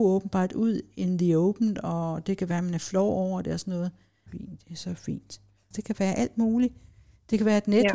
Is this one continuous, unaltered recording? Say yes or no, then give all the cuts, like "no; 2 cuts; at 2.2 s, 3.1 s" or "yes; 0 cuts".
no; 2 cuts; at 4.3 s, 5.7 s